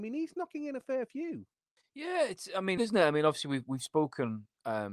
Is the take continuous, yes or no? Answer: no